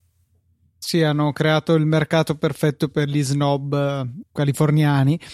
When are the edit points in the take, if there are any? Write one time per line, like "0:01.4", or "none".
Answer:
0:04.2